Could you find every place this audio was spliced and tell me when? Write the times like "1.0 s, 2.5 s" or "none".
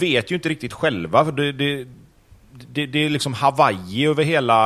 none